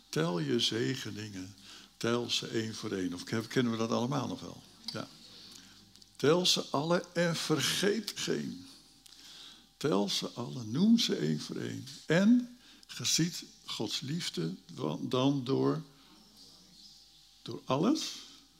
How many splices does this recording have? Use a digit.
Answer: 2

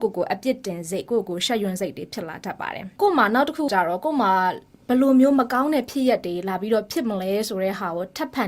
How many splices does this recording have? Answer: 1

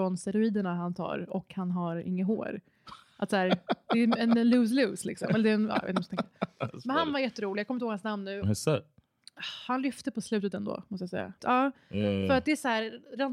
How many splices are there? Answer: 2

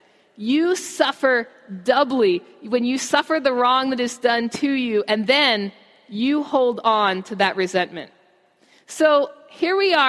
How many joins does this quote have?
0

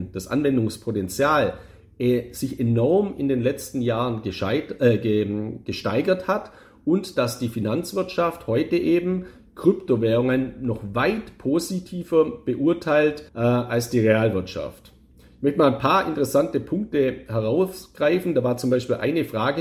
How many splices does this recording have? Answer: 1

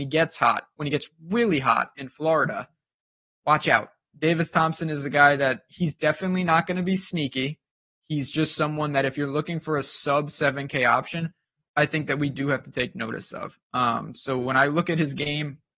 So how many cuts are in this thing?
0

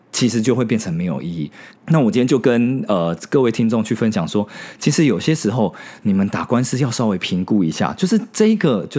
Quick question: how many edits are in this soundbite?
1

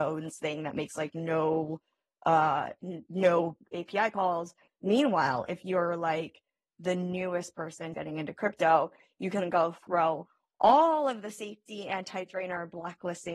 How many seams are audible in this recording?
2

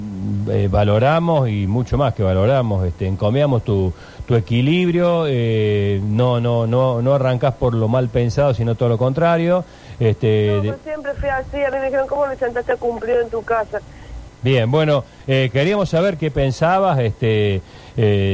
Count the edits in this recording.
2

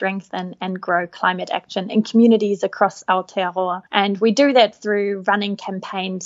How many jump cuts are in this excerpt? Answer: 1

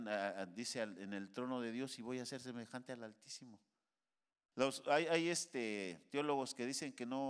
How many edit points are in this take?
1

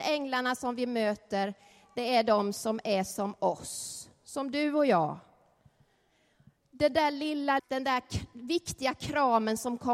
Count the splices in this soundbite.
1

